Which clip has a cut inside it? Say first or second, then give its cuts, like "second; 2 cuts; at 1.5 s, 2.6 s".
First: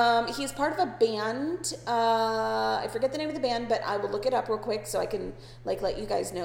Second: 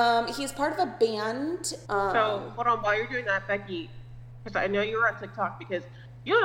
second; 1 cut; at 1.8 s